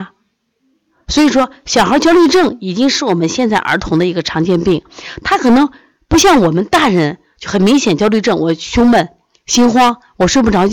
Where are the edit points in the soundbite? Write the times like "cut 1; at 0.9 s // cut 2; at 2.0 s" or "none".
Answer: none